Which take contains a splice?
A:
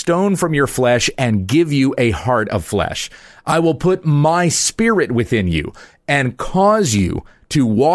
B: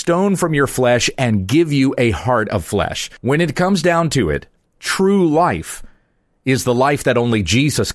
B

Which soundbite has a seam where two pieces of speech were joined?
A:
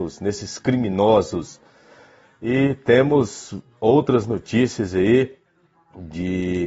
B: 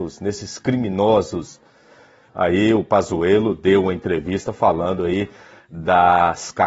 B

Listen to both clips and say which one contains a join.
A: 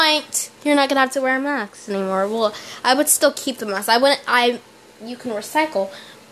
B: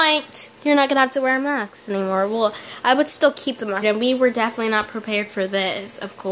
B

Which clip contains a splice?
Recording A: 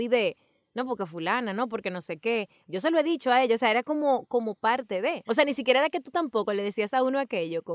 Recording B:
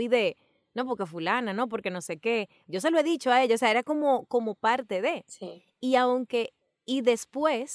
A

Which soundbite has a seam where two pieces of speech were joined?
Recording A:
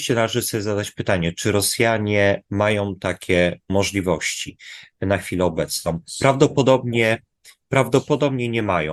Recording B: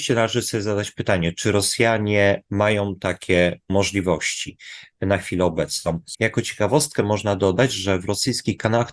B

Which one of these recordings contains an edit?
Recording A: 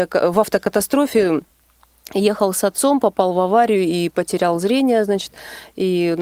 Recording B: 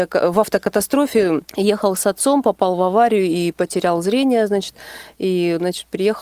B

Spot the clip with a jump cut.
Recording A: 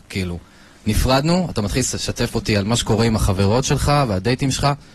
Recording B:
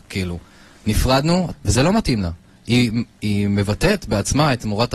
B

